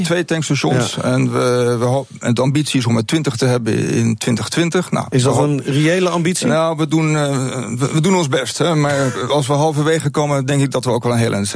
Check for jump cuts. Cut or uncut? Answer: uncut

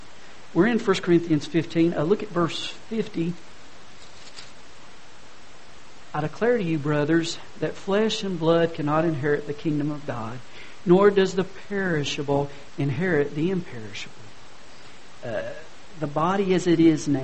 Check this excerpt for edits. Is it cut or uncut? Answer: uncut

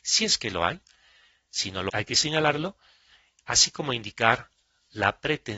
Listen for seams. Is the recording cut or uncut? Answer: cut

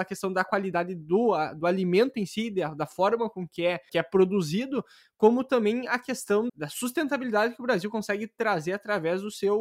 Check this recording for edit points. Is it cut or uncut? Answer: cut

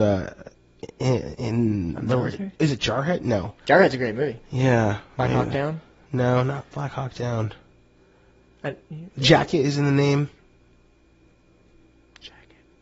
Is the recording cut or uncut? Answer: uncut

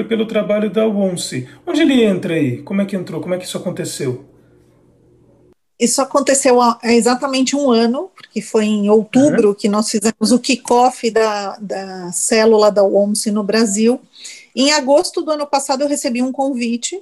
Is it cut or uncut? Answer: uncut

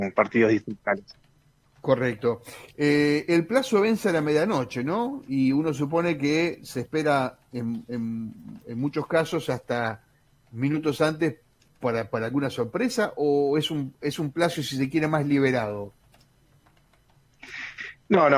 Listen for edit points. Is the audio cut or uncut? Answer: uncut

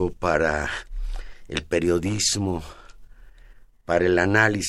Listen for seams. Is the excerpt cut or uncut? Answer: uncut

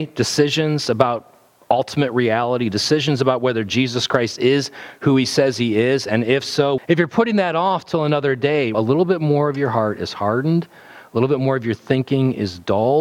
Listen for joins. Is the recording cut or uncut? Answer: cut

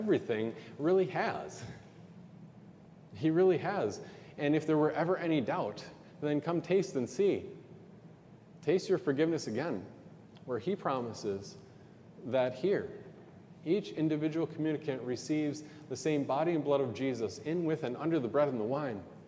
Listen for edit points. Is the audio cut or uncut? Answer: uncut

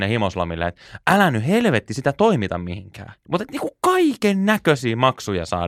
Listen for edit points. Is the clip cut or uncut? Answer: cut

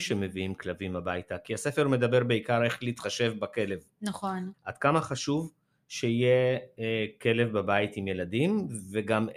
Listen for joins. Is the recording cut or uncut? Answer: cut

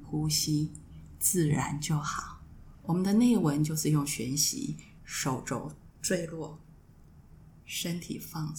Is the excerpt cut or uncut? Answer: cut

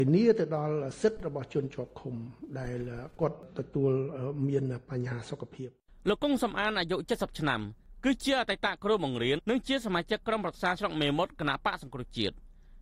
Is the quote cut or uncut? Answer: cut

